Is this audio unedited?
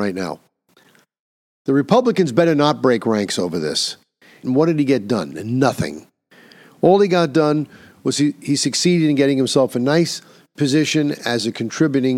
no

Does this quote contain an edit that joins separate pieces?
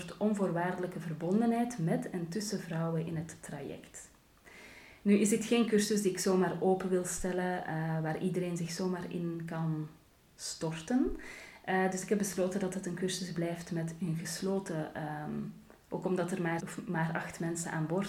yes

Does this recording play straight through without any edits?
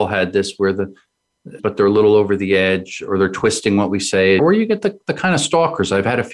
no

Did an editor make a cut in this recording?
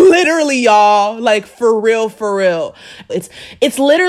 yes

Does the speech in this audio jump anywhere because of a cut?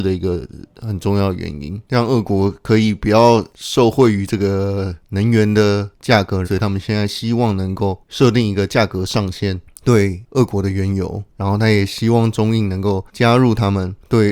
yes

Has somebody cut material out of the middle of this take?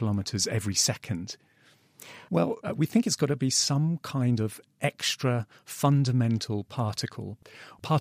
yes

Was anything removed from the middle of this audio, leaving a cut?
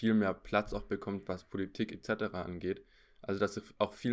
no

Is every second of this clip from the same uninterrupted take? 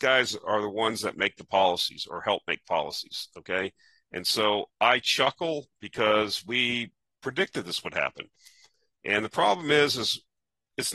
yes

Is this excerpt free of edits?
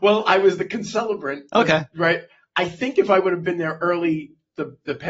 yes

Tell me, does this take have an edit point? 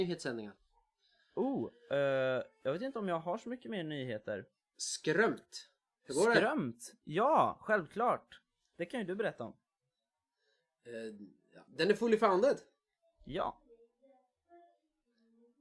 no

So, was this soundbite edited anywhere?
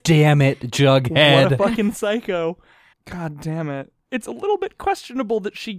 yes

